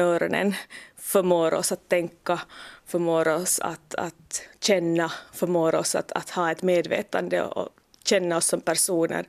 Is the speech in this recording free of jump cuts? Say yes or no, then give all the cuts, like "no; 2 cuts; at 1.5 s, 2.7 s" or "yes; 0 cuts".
yes; 0 cuts